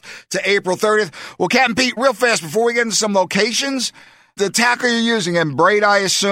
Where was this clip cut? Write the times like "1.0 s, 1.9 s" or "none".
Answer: 2.0 s, 4.4 s